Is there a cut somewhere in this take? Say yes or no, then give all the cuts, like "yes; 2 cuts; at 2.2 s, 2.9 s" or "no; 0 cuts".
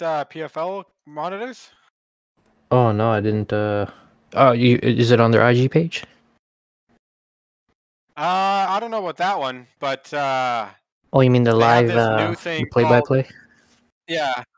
no; 0 cuts